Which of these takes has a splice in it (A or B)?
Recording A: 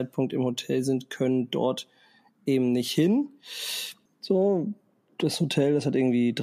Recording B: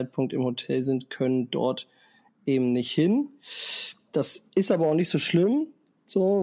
A